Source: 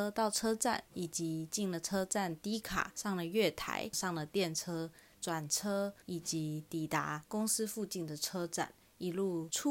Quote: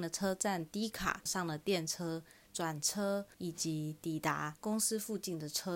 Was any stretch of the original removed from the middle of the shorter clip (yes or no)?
yes